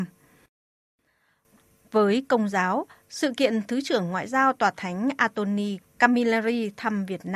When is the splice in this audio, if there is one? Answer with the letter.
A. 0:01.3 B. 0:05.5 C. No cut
C